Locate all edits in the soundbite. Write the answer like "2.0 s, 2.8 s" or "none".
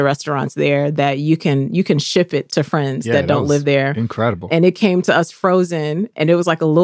2.5 s